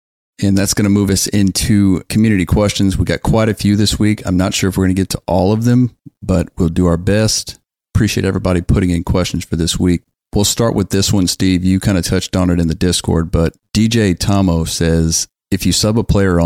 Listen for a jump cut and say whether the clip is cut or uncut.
uncut